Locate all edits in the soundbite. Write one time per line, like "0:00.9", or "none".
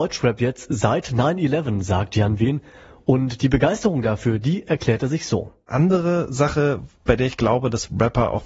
none